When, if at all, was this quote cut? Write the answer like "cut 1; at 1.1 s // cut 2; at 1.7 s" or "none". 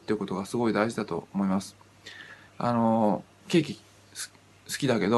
cut 1; at 2.5 s